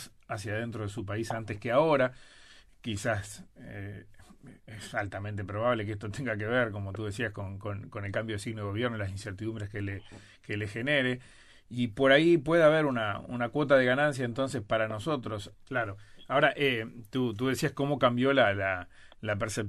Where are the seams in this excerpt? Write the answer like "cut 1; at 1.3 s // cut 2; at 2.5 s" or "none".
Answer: cut 1; at 15.5 s